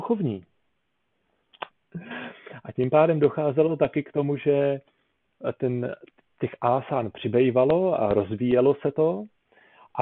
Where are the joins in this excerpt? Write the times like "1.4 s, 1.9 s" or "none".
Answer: 1.7 s